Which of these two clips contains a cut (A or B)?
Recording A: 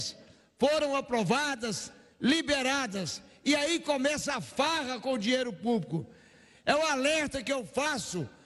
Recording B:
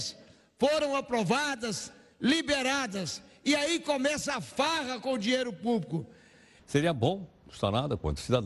B